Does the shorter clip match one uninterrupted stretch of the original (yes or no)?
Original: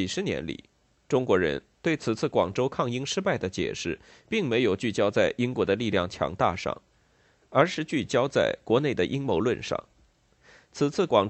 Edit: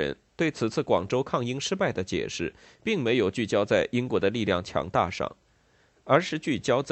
yes